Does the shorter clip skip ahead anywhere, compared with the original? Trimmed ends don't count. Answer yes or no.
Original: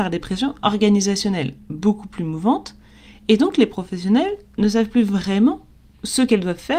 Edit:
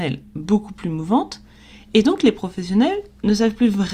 no